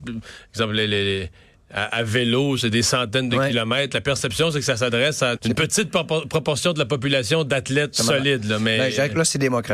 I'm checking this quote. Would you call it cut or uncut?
cut